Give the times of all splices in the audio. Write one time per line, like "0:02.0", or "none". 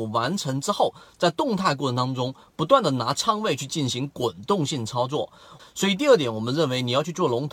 0:05.6